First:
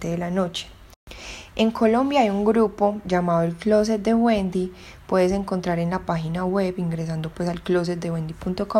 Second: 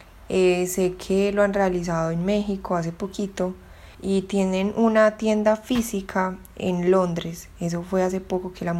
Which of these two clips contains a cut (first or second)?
second